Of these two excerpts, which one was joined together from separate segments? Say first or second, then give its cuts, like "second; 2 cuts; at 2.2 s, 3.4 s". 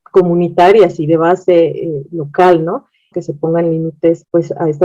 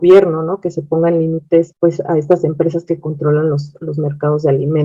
first; 1 cut; at 3.1 s